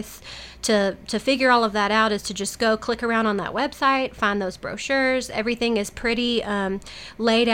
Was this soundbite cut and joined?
no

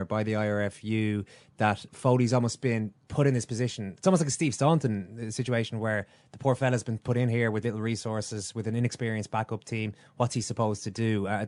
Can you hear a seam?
yes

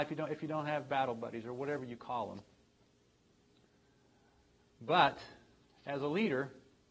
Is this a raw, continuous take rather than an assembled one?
yes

